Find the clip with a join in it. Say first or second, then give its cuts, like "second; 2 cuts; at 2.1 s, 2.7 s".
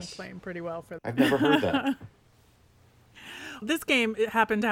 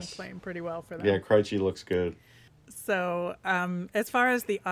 first; 2 cuts; at 1.0 s, 3.6 s